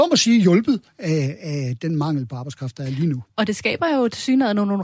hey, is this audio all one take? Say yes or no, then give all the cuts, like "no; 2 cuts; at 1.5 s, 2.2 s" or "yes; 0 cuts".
yes; 0 cuts